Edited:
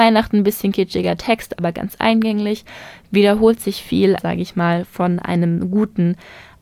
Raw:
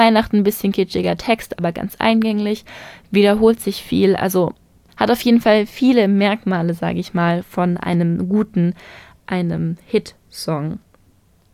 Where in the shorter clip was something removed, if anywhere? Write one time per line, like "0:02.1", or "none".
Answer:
0:04.2

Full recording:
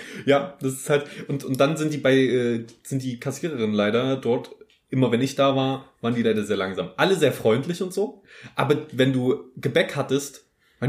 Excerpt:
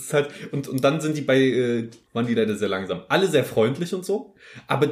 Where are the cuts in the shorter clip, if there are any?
0:02.1

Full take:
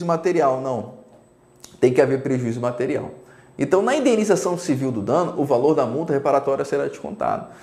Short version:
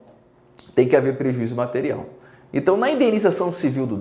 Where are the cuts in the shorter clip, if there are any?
none

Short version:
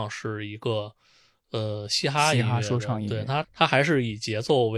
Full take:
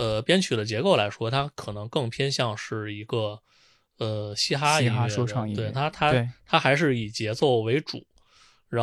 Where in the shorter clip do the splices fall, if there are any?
0:03.4

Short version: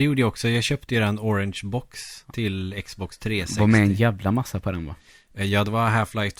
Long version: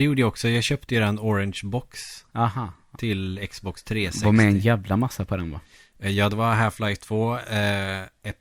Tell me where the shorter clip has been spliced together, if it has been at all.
0:02.2

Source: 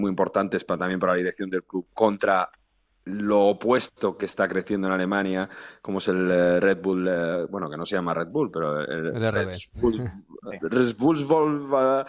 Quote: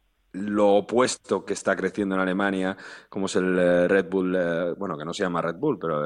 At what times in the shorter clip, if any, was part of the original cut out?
none

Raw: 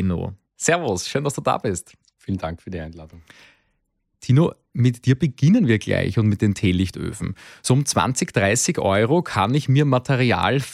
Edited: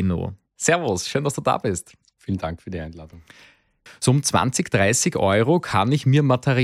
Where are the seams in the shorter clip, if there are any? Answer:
0:03.9

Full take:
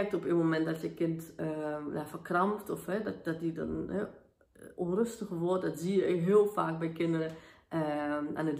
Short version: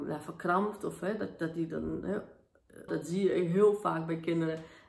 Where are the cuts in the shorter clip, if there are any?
0:02.9

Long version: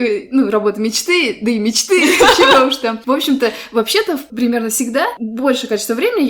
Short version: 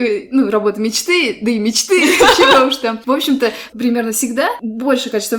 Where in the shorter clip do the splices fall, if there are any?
0:03.7

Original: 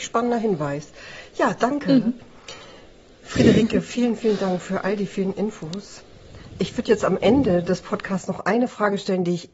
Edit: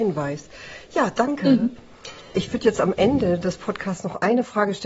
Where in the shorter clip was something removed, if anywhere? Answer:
0:02.3

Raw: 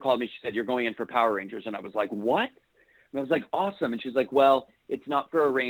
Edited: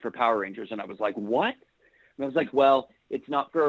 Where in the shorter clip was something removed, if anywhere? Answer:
0:02.5

